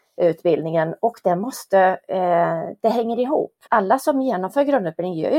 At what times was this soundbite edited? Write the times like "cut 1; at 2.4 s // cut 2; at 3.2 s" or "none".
cut 1; at 3.7 s